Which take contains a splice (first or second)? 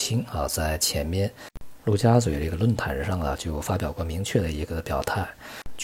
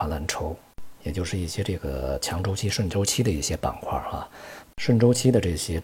second